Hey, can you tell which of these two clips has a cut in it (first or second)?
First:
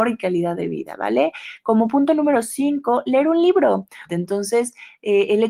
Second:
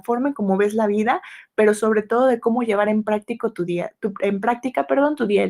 first